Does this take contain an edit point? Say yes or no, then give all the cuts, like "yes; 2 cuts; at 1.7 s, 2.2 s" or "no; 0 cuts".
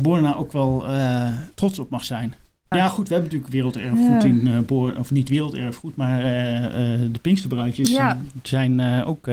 yes; 1 cut; at 2.7 s